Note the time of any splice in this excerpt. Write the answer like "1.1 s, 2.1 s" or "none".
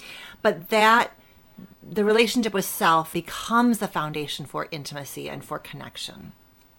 3.1 s